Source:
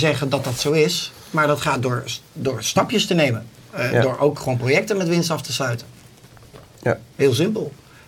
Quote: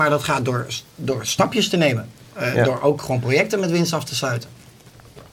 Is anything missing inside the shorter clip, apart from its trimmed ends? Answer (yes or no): no